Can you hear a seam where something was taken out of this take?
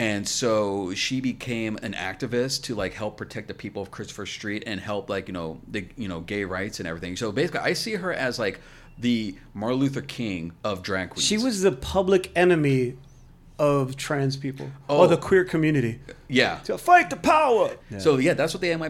yes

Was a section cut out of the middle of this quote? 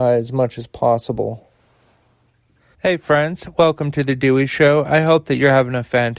yes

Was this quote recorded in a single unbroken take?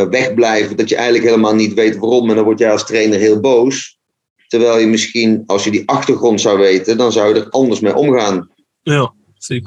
yes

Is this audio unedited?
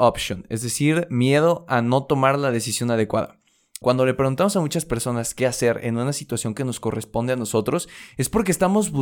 no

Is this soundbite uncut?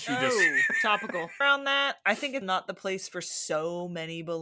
no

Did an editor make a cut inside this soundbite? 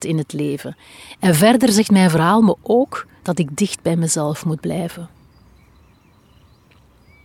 yes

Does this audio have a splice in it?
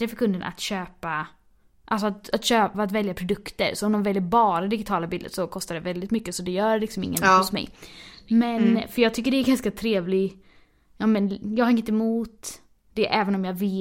no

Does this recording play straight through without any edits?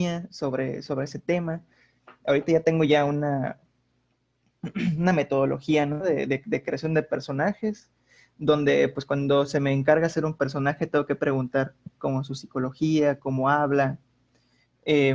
yes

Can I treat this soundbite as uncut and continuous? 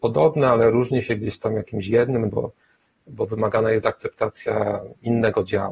no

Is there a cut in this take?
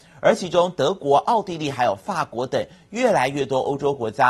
no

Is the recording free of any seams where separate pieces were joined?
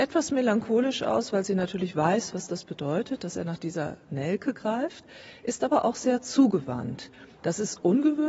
no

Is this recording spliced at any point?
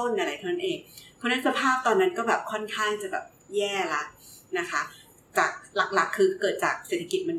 no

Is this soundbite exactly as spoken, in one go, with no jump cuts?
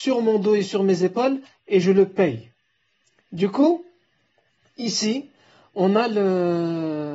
yes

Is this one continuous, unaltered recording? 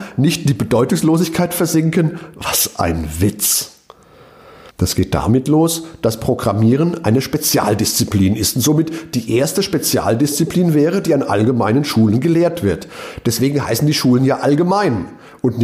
yes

